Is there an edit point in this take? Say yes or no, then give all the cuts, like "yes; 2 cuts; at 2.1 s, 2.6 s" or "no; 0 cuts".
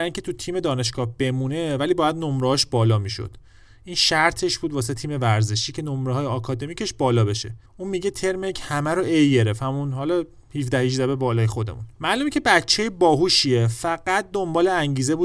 yes; 2 cuts; at 7.7 s, 11.9 s